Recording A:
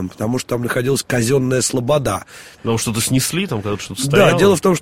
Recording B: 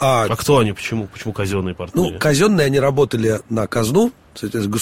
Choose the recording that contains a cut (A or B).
A